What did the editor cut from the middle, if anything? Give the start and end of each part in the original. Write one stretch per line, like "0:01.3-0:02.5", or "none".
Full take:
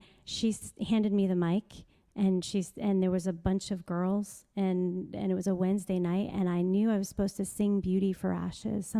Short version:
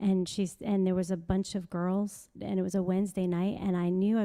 0:04.5-0:05.1